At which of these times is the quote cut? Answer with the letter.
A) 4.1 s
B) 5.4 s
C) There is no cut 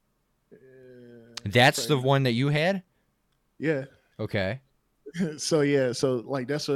A